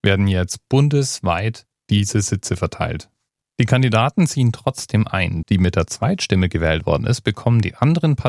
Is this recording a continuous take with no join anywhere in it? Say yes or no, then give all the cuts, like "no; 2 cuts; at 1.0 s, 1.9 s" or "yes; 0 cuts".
no; 2 cuts; at 3.5 s, 5.4 s